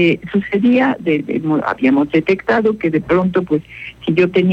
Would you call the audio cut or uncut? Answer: uncut